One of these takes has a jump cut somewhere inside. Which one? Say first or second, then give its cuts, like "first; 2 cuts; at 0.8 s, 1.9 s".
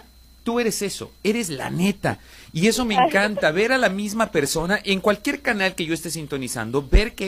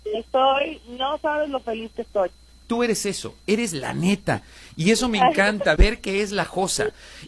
second; 2 cuts; at 2.5 s, 5.8 s